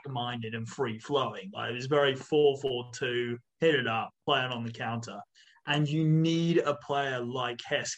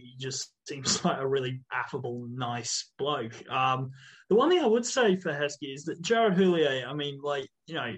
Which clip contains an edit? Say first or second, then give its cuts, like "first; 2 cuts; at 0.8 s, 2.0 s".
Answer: first; 1 cut; at 3.5 s